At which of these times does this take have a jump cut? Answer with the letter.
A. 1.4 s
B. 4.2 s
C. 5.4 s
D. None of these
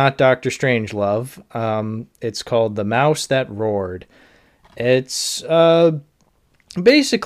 D